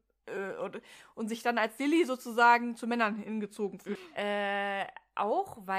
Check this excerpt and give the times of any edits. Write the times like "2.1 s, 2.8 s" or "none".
4.0 s